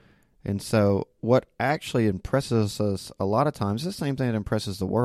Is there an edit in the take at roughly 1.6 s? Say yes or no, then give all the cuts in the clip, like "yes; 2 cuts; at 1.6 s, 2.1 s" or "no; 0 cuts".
no; 0 cuts